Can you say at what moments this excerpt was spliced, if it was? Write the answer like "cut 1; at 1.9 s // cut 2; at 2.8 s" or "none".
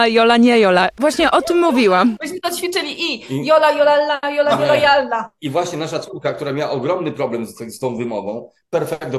none